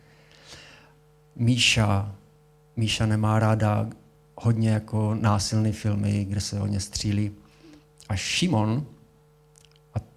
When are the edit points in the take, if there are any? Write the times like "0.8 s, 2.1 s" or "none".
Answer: none